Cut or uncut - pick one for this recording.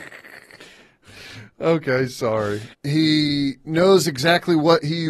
cut